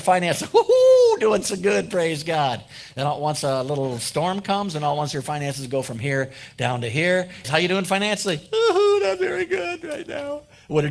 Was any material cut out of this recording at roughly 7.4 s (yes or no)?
yes